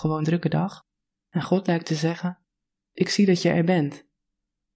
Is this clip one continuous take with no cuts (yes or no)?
yes